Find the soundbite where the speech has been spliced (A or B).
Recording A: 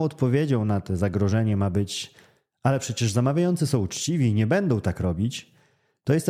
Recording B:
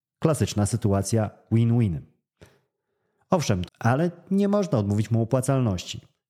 B